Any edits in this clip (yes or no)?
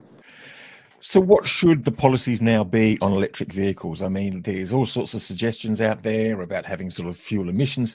no